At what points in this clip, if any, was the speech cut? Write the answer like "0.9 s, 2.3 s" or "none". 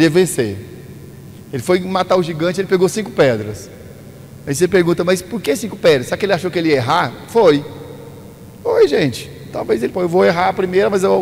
9.9 s